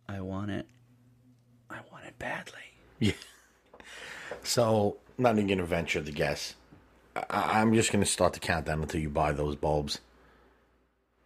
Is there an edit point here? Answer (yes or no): no